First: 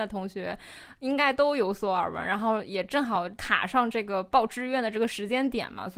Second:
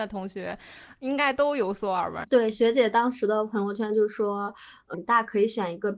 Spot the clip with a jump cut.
second; 2 cuts; at 2.2 s, 4.9 s

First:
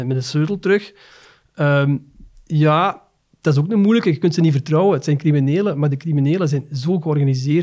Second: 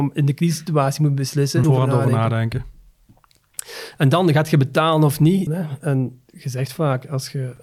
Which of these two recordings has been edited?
second; 2 cuts; at 1.6 s, 5.5 s

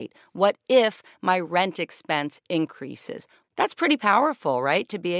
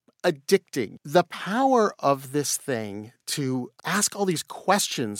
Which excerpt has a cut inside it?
first; 1 cut; at 3.4 s

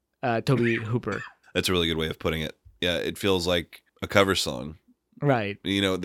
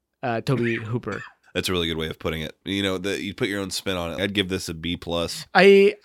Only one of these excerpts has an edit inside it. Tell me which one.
second; 2 cuts; at 2.6 s, 4.2 s

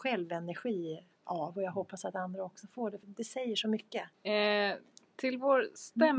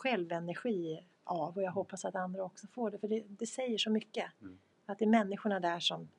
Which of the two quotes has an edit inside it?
first; 2 cuts; at 3.0 s, 4.1 s

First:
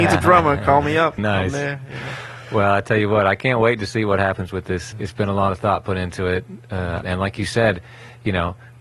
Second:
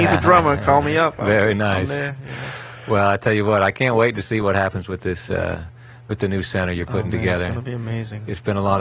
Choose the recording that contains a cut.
first; 3 cuts; at 1.2 s, 4.9 s, 7.0 s

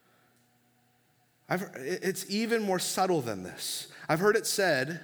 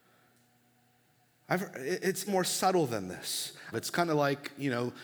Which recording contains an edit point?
second; 2 cuts; at 2.3 s, 3.7 s

